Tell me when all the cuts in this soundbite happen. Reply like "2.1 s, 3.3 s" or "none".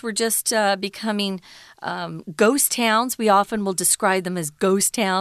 none